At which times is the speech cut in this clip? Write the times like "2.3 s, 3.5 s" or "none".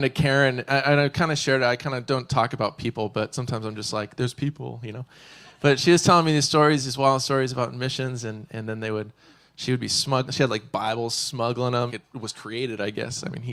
11.9 s